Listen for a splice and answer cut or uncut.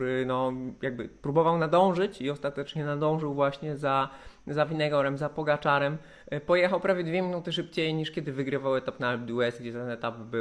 uncut